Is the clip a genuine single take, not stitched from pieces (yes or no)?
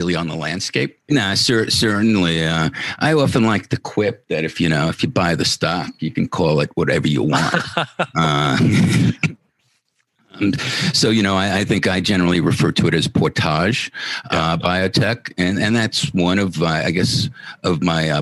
no